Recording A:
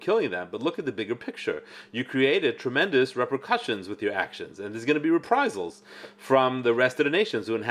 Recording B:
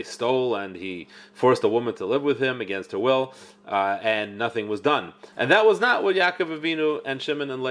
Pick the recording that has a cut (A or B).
B